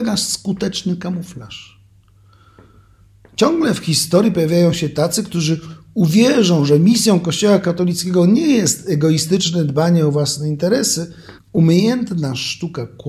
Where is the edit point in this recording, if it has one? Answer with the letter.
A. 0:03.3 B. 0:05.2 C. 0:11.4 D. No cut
C